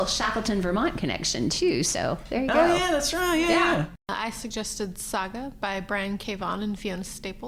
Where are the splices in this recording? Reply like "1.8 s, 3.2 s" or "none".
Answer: none